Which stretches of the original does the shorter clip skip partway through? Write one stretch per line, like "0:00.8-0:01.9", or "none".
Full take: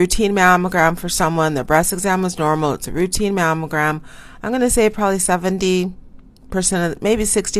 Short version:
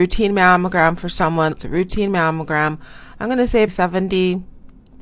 0:01.5-0:02.7
0:04.9-0:05.2

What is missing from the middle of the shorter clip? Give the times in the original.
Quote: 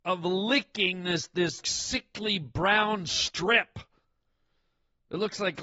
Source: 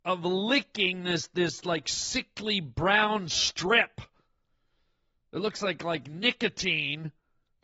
0:01.6-0:01.8

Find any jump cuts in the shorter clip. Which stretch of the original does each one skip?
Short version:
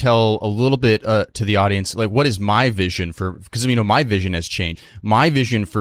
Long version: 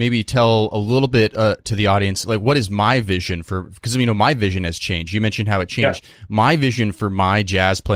0:05.1-0:06.0

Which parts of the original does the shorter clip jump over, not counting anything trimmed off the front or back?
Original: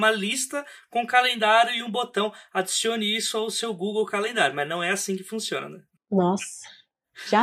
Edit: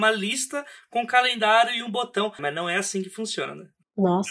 0:02.4-0:04.5

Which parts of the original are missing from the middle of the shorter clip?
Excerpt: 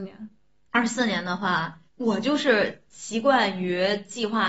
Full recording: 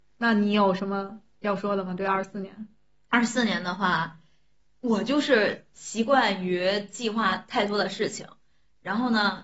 0:04.2-0:04.7

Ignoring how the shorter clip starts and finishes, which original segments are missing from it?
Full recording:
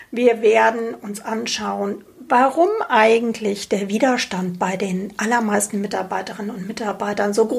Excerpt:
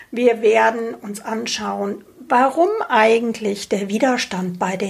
none

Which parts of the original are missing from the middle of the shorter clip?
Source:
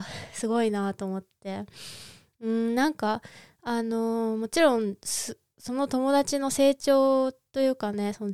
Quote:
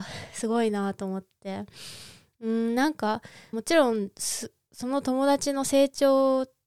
0:03.5-0:04.4

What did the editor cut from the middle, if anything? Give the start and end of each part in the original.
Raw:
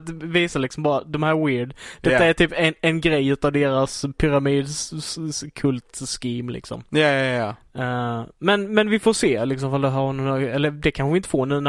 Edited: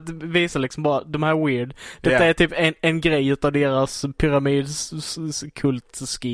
none

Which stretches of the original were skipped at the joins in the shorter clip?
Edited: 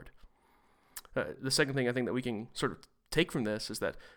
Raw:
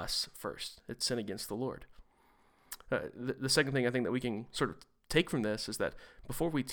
0:03.1-0:03.3

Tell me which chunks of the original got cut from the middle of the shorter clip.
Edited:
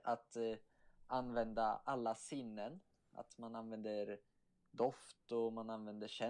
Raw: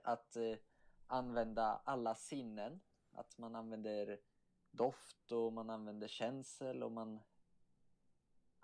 none

